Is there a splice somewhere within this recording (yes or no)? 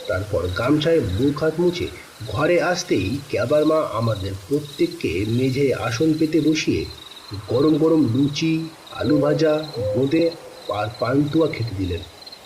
no